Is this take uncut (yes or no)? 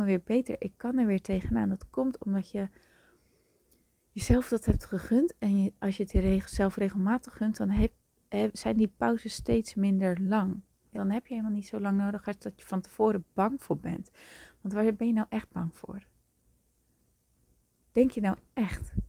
no